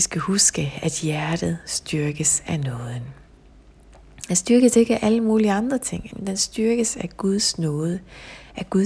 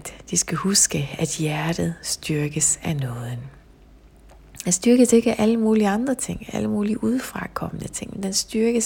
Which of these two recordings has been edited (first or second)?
first